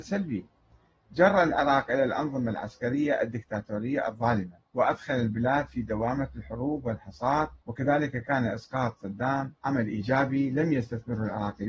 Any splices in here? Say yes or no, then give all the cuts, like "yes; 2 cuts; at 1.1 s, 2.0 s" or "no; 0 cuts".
yes; 3 cuts; at 4.6 s, 7.6 s, 9.6 s